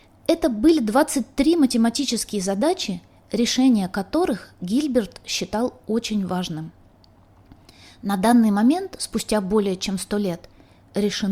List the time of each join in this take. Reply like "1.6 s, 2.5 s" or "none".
none